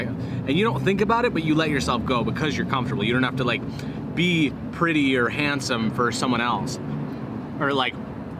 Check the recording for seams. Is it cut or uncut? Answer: uncut